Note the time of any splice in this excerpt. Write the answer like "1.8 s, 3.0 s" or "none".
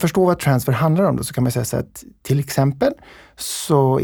none